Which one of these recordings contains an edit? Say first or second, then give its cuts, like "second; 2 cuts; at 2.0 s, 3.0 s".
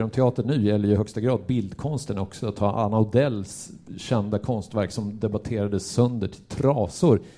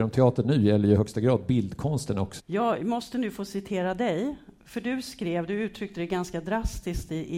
second; 1 cut; at 2.4 s